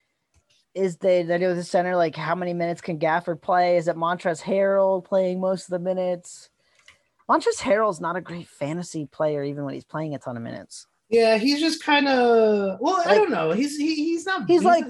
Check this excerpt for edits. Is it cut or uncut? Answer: uncut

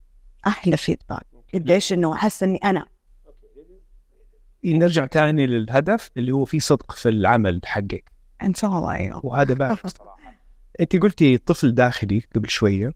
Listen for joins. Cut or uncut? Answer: uncut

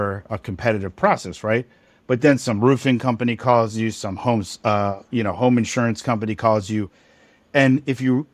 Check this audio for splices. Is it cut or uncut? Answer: uncut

